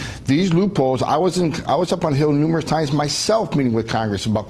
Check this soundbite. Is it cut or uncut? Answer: uncut